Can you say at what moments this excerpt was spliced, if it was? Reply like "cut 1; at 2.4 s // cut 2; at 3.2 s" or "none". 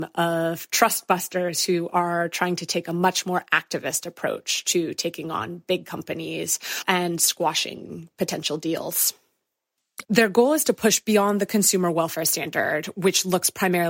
cut 1; at 10.0 s